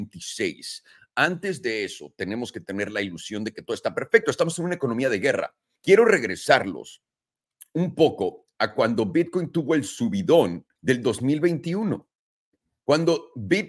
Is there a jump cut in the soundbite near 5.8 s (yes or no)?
yes